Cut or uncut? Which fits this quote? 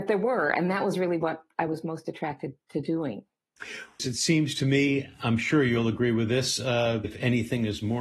cut